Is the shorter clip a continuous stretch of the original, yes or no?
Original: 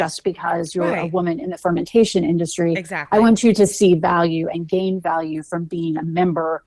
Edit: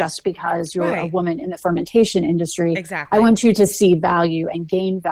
yes